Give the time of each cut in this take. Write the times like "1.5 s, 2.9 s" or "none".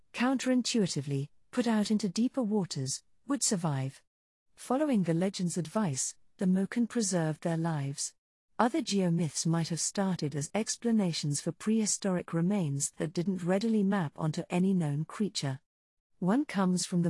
16.0 s

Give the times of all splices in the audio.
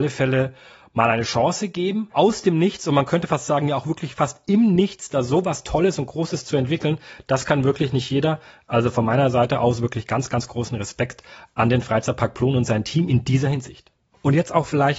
none

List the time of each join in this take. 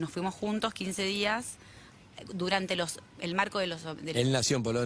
none

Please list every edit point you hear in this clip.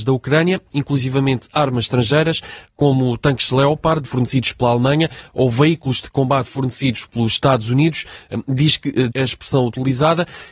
4.0 s, 9.1 s

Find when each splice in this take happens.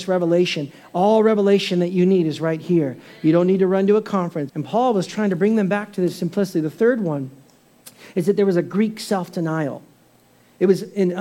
4.5 s

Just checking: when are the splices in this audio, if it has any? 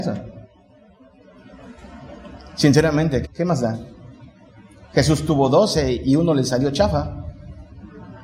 3.2 s

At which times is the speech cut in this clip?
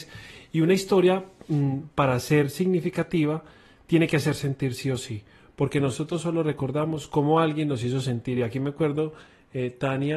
none

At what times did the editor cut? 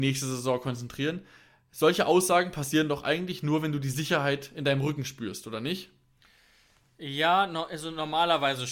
none

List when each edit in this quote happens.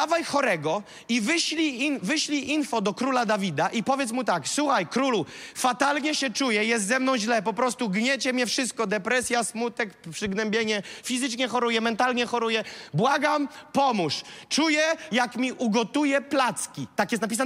15.1 s

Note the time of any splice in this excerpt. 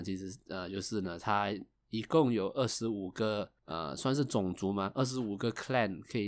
none

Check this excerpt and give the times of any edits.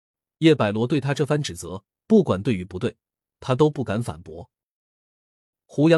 none

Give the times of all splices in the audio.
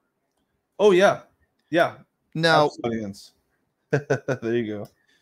2.8 s

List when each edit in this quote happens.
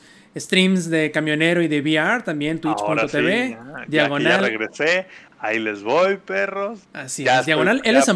6.8 s

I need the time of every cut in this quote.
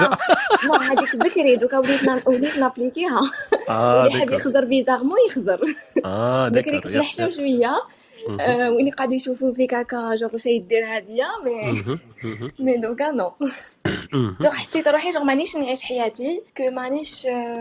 16.5 s

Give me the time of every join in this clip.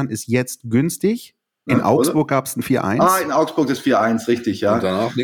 1.7 s

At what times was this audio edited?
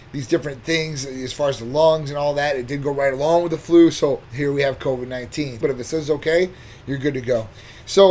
4.2 s, 5.6 s

